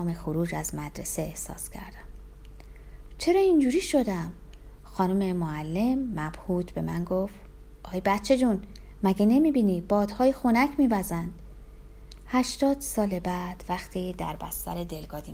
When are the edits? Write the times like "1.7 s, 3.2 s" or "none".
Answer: none

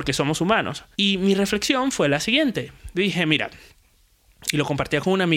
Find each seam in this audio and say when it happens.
0.9 s

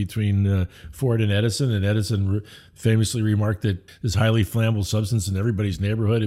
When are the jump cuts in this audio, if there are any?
3.9 s

